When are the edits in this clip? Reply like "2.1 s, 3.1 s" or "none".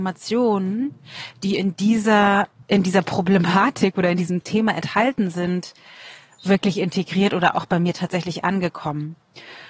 none